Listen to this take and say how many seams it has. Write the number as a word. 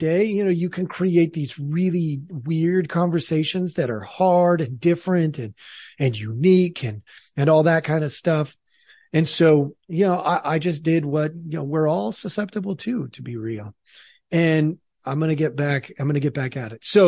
zero